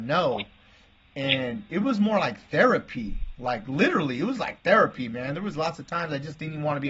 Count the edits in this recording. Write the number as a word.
zero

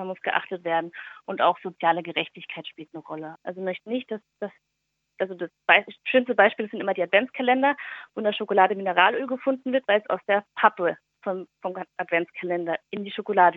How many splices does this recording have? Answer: one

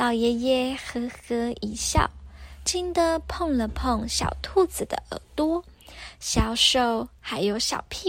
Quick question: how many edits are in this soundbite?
one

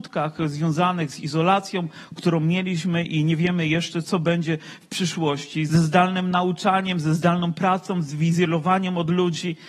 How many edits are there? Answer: two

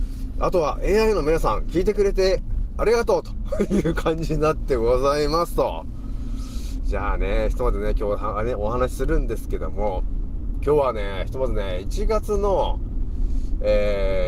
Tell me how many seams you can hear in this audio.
zero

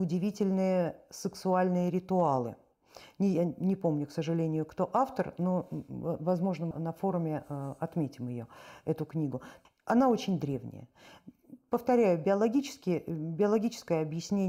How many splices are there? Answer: two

